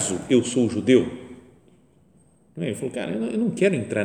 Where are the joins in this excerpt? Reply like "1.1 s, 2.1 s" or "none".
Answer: none